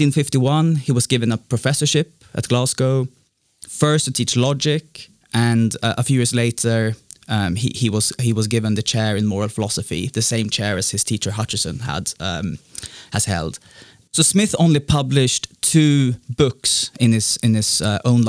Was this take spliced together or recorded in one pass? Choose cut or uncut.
cut